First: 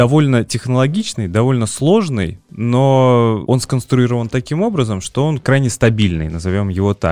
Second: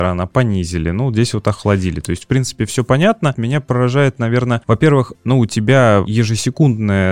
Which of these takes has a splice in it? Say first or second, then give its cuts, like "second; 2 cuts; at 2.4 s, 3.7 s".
second; 2 cuts; at 3.3 s, 5.1 s